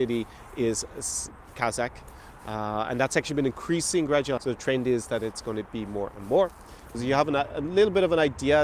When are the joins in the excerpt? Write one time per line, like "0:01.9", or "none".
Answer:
0:04.4
0:06.9